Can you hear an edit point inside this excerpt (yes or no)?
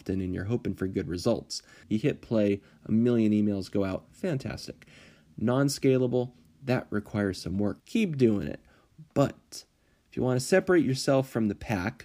yes